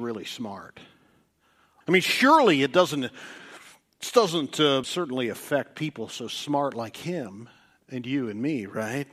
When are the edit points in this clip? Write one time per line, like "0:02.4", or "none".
0:01.8
0:04.8